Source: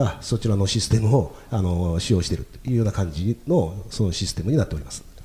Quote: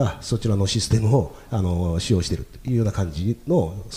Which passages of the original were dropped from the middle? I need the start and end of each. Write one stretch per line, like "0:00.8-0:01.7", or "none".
none

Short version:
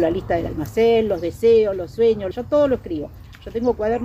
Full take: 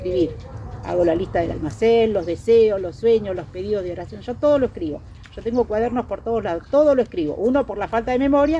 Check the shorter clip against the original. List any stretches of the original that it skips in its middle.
0:03.4-0:04.2

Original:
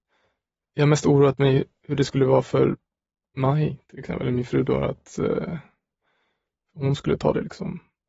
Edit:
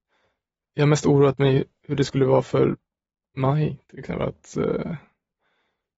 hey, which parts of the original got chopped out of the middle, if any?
0:04.2-0:04.8

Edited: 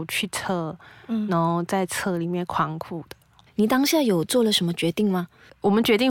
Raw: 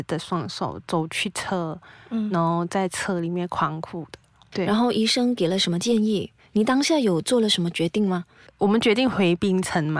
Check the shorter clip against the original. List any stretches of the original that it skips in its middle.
0:04.5-0:06.4

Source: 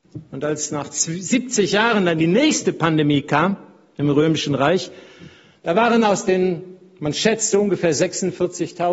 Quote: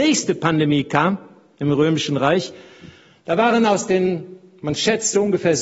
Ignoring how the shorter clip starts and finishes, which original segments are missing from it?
none

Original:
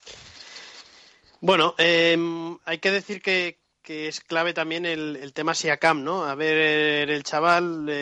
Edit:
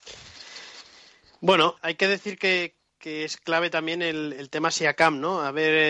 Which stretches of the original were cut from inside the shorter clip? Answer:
0:01.7-0:02.6

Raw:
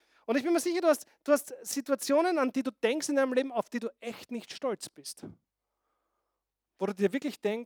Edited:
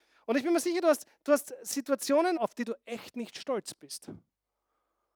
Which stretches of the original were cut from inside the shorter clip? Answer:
0:02.4-0:03.5

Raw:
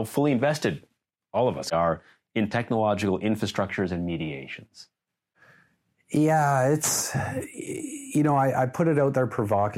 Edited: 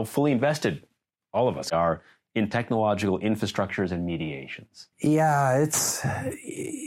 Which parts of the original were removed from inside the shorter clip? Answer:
0:04.9-0:06.0

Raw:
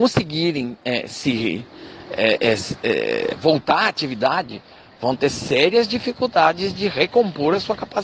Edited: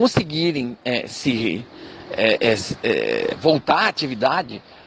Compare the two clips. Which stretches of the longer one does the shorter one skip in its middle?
none

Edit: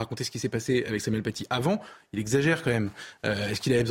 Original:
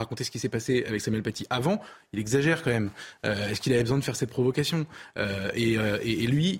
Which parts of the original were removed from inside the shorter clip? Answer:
none

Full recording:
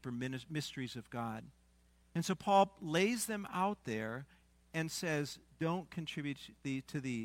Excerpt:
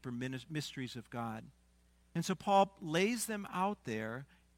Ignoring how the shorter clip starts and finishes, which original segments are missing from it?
none

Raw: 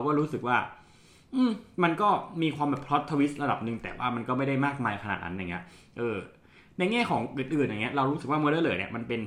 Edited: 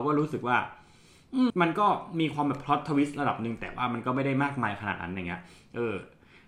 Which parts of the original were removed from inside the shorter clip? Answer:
0:01.5-0:01.7

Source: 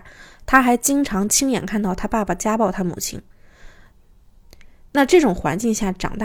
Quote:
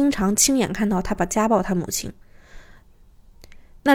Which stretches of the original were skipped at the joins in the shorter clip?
0:02.1-0:02.2

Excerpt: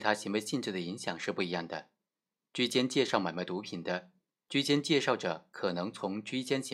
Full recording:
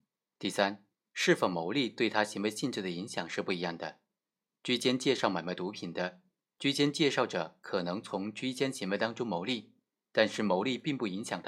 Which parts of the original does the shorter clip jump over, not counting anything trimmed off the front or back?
none

